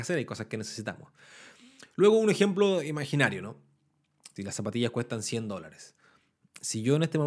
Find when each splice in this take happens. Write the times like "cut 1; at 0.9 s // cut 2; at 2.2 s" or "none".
cut 1; at 4.4 s